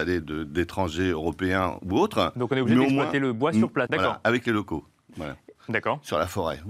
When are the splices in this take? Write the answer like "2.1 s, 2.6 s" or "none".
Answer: 3.9 s, 5.5 s